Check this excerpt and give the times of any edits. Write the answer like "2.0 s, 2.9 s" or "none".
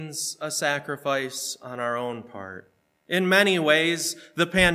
2.9 s